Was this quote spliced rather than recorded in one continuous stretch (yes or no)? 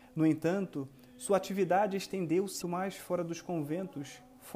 yes